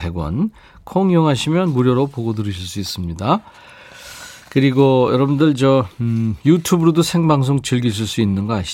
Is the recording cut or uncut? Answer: uncut